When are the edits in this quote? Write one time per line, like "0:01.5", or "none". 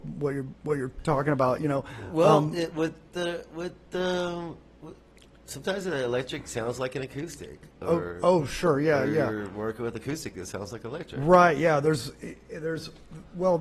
none